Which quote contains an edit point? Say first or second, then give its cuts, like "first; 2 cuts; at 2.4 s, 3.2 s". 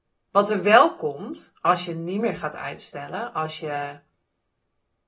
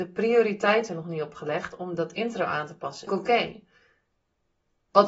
second; 1 cut; at 3.1 s